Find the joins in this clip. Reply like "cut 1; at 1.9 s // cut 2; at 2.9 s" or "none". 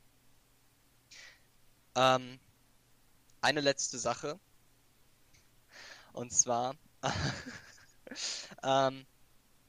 cut 1; at 5.3 s